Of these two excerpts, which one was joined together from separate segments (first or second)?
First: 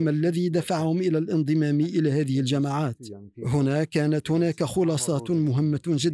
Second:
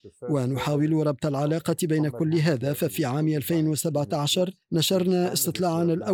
second